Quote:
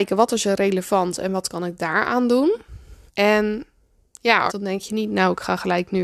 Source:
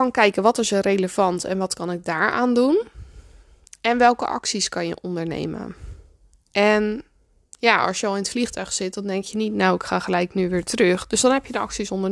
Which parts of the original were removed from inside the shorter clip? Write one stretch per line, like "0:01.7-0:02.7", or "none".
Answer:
0:03.3-0:06.4
0:07.9-0:08.9